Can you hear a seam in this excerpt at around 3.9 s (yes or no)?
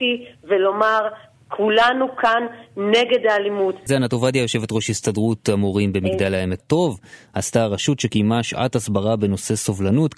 yes